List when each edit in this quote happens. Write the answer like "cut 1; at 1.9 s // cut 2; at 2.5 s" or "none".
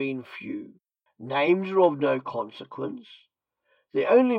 cut 1; at 1.1 s